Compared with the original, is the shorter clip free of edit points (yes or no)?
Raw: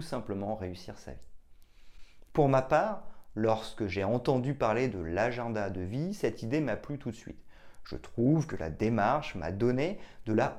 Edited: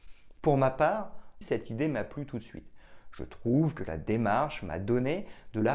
no